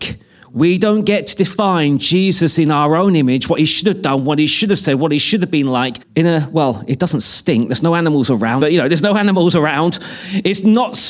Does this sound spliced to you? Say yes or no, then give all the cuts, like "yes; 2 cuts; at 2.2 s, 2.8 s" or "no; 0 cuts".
yes; 2 cuts; at 6.0 s, 8.6 s